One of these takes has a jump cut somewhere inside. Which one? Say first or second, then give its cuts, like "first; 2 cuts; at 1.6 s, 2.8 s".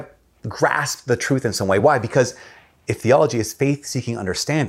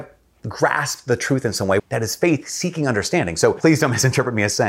second; 1 cut; at 1.8 s